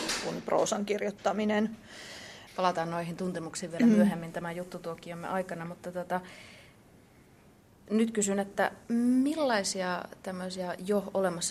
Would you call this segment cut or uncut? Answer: cut